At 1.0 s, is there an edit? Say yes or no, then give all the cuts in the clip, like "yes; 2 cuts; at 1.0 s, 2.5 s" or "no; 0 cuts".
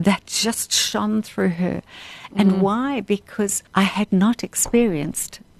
no; 2 cuts; at 2.3 s, 3.7 s